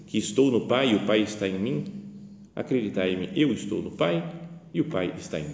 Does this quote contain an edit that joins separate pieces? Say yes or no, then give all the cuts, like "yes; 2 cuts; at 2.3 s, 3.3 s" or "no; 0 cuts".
yes; 1 cut; at 2.5 s